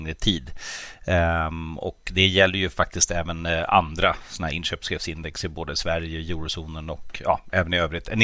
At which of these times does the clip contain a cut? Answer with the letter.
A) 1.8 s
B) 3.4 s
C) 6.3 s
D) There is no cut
D